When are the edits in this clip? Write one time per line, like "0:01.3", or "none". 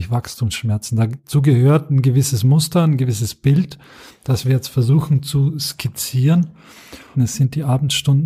0:07.1

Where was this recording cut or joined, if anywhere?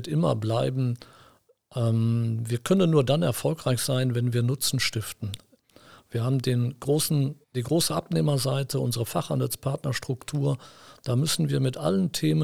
0:07.4

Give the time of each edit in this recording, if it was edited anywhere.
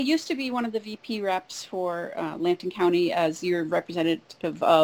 none

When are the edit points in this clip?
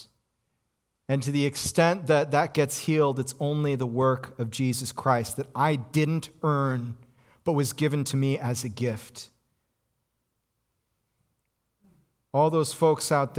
none

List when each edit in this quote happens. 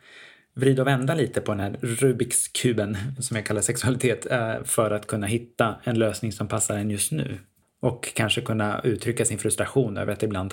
0:03.2

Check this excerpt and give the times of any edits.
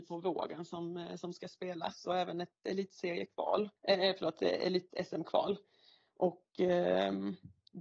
0:03.8

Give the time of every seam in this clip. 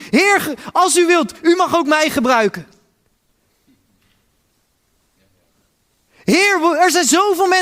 none

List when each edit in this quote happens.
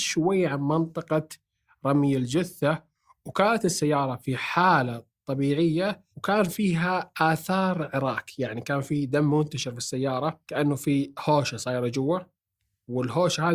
0:06.1
0:10.4

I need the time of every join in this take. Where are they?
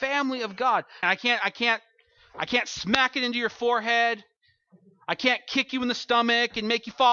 0:01.0

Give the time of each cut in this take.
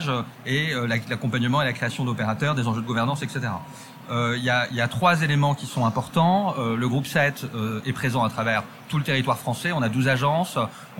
none

